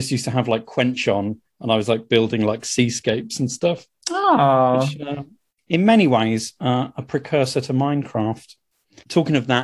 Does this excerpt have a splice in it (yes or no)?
no